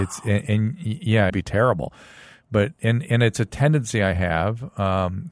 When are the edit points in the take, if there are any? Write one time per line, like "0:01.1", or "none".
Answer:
0:01.3